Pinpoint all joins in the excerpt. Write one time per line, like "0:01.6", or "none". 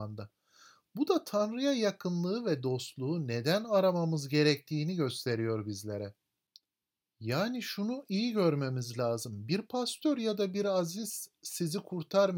none